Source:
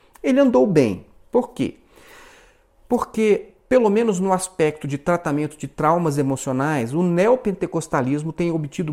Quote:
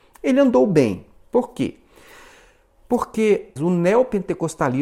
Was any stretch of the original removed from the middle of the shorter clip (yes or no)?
yes